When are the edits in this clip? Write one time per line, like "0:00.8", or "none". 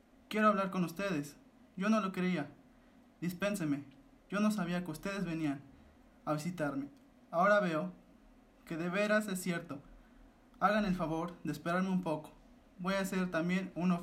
none